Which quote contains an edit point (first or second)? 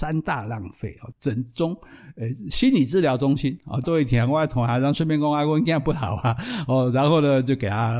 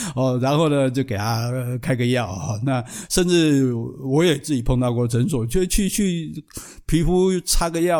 first